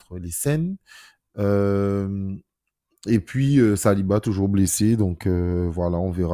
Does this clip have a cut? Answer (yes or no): no